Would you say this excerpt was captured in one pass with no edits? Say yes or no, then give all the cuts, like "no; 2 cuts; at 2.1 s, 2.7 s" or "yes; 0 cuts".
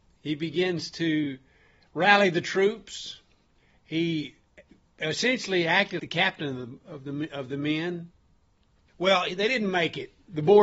no; 2 cuts; at 6.0 s, 8.9 s